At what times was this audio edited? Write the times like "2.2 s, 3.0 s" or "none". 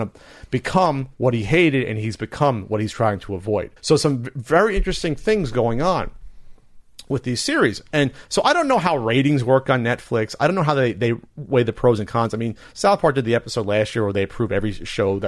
3.8 s